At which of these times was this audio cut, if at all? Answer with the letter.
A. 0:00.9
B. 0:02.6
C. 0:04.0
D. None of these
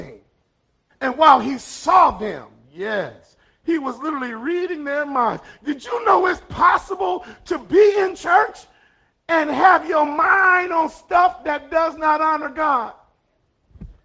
A